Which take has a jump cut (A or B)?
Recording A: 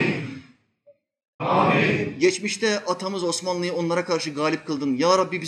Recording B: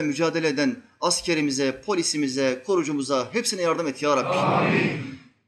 A